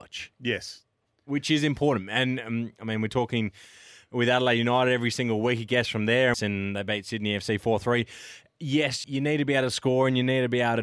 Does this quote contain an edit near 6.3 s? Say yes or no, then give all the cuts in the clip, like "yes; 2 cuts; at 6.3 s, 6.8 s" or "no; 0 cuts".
yes; 2 cuts; at 6.3 s, 9.0 s